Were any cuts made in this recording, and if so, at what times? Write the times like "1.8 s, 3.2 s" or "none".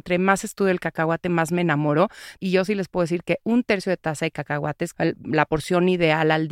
2.4 s, 4.9 s

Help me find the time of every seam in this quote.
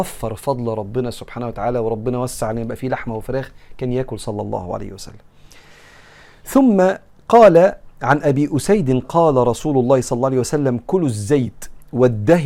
9.0 s

